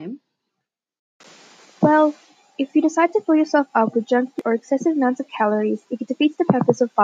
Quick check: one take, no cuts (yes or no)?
yes